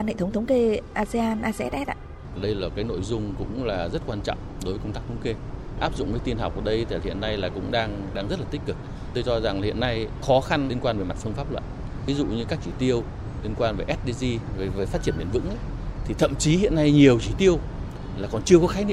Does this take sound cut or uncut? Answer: uncut